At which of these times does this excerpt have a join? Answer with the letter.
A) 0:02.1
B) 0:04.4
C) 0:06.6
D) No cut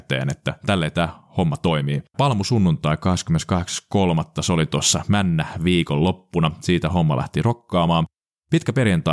A